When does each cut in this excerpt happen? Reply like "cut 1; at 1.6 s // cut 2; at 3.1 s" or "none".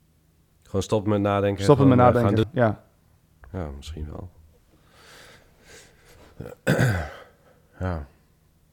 cut 1; at 2.4 s

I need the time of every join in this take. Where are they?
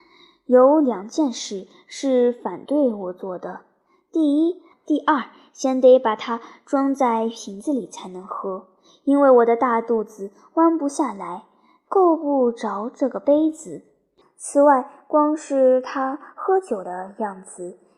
cut 1; at 4.7 s // cut 2; at 14.2 s

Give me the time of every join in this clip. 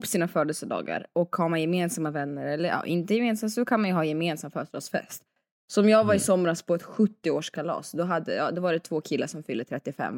none

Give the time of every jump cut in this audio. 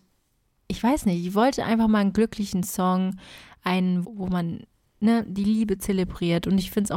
cut 1; at 4.0 s

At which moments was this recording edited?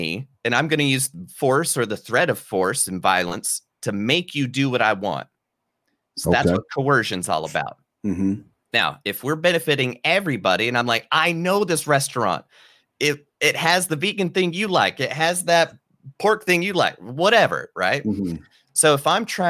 none

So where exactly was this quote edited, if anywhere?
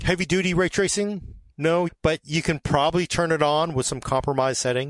cut 1; at 1.9 s

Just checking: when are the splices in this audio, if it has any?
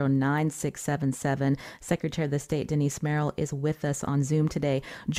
none

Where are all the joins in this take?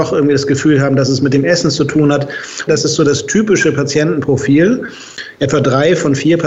cut 1; at 2.7 s

